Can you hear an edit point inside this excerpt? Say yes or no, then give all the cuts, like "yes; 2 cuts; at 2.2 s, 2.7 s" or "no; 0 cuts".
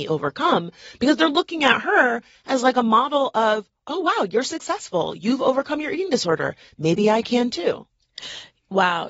no; 0 cuts